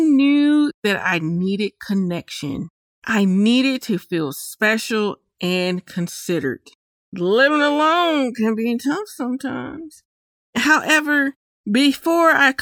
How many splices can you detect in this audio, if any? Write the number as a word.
zero